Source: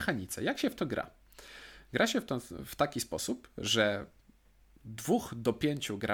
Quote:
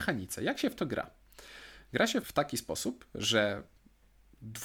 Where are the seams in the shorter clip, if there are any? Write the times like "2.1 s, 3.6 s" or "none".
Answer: 2.2 s